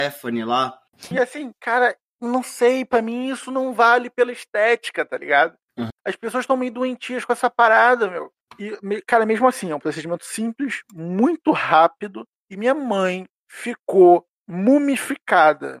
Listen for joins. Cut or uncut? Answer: cut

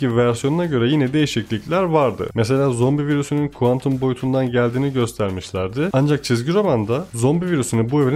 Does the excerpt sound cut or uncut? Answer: uncut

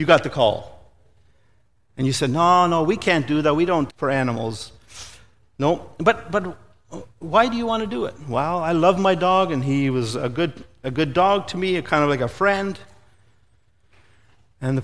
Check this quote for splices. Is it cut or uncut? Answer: cut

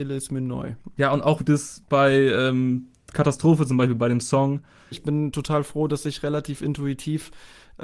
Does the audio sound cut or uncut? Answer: cut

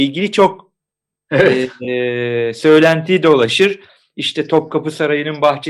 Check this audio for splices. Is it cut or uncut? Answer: uncut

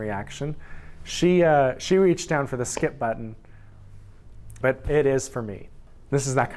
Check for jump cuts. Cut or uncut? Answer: cut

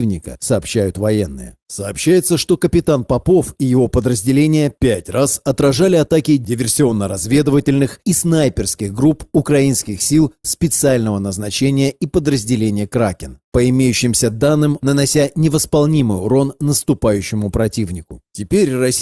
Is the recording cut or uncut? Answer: cut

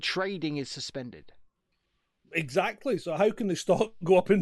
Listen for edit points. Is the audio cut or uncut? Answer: uncut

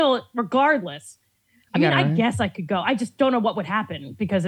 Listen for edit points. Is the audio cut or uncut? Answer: uncut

